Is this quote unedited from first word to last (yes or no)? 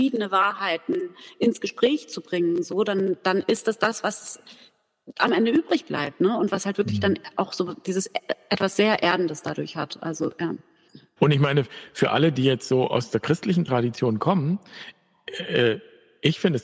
no